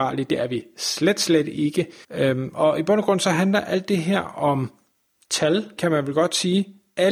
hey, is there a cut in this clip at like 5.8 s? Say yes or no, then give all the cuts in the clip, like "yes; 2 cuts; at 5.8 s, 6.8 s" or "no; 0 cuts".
yes; 2 cuts; at 2.0 s, 5.8 s